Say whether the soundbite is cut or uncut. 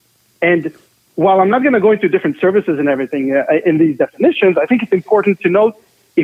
uncut